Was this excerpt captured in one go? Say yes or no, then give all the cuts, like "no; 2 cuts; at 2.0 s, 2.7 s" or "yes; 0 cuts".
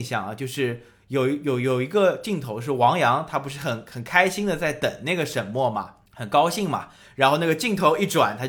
no; 1 cut; at 6.1 s